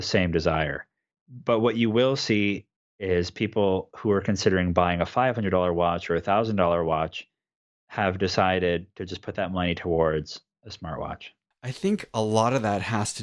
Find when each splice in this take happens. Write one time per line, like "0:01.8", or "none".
0:02.8
0:11.5